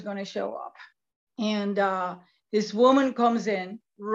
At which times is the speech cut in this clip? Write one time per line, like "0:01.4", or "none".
0:01.3